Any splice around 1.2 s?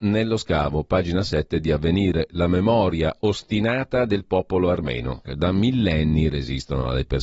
no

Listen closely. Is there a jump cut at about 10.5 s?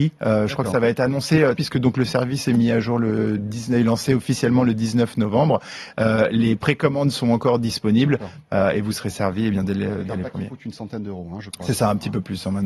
no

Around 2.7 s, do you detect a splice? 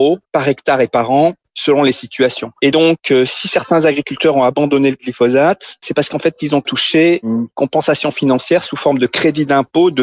no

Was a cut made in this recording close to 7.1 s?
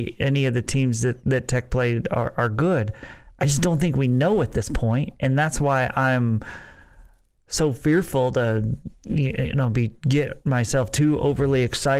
no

